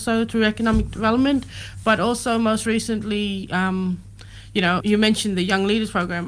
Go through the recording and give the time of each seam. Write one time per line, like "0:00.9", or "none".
0:04.8